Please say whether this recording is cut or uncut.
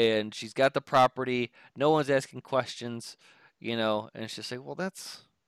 uncut